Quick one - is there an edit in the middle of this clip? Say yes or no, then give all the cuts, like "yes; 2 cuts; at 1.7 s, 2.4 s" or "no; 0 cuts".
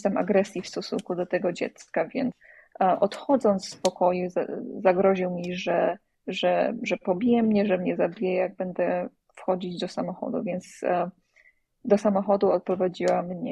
no; 0 cuts